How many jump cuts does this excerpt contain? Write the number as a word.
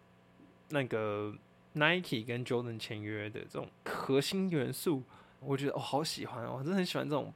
two